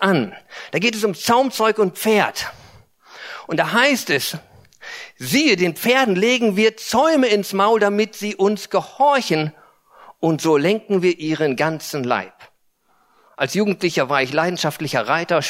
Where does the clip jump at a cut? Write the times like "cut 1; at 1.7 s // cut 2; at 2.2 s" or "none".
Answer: none